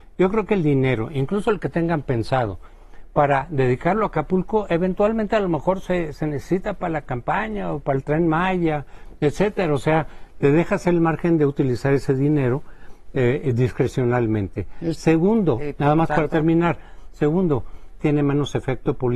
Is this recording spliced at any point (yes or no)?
yes